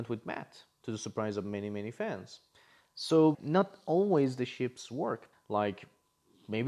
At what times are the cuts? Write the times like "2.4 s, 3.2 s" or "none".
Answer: 3.3 s, 5.3 s

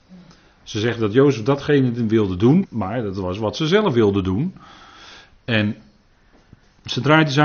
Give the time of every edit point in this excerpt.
2.6 s

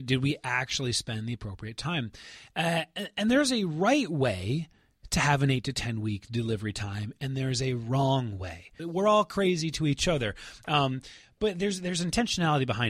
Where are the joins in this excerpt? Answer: 8.8 s

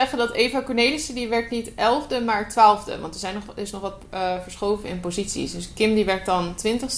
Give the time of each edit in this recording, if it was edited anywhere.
none

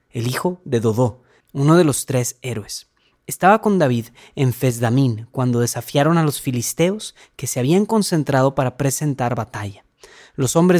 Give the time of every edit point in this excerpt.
1.4 s

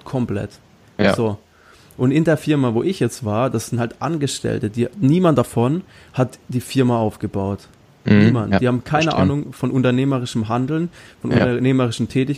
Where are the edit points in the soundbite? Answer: none

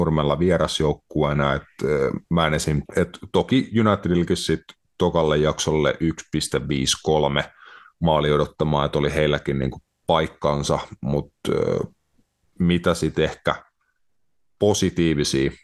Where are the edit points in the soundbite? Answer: 2.9 s

